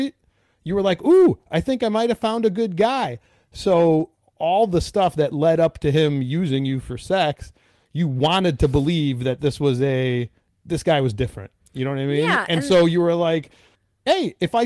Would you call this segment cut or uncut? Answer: uncut